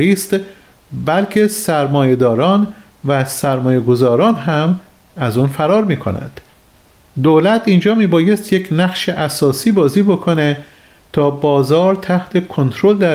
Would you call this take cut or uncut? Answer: uncut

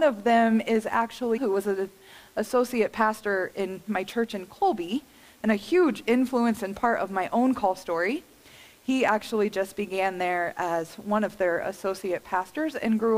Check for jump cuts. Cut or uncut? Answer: cut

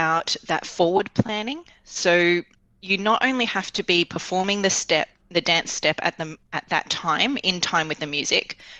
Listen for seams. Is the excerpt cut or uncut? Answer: uncut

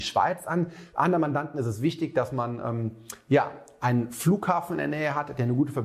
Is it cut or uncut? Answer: uncut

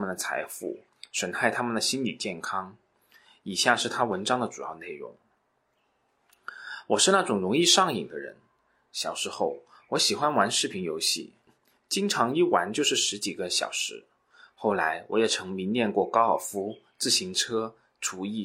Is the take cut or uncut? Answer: uncut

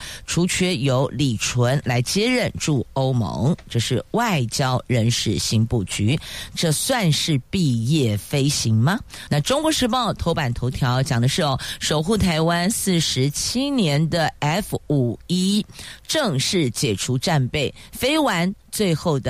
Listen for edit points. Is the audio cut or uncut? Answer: cut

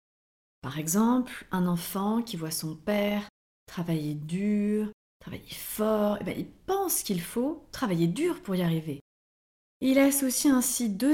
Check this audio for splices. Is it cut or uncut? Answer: uncut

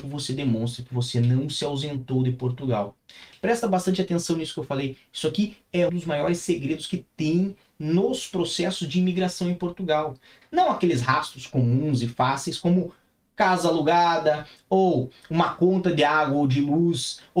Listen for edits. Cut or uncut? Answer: cut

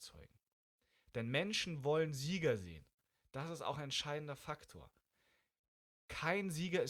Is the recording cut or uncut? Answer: uncut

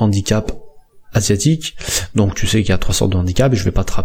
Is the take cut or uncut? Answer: uncut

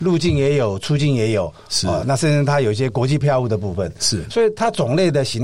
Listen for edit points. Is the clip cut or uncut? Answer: uncut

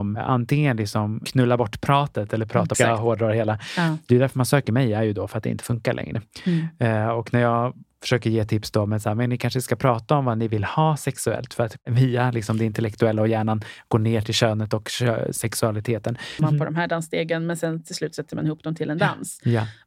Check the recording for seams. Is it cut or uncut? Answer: cut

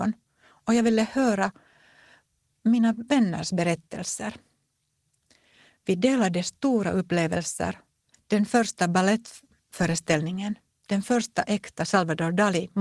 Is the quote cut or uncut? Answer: cut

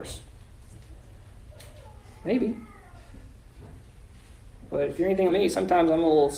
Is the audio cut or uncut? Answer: cut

